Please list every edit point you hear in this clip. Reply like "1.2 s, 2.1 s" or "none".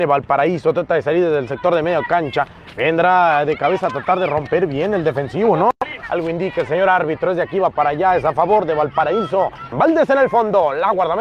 6.0 s, 9.7 s